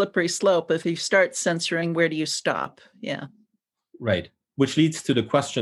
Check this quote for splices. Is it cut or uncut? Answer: cut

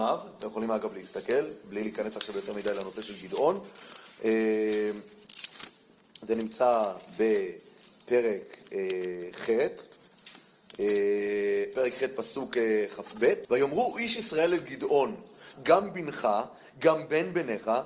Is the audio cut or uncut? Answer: cut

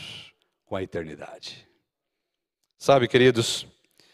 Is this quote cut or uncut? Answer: uncut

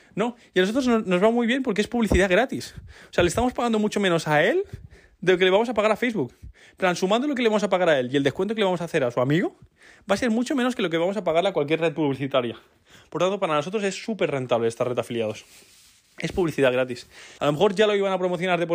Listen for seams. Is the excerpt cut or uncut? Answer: cut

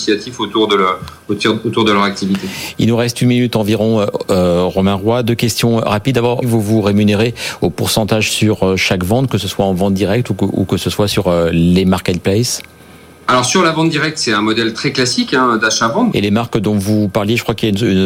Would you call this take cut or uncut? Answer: cut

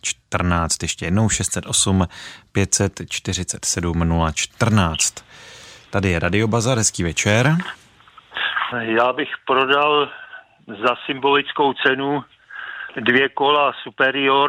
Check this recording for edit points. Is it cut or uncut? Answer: cut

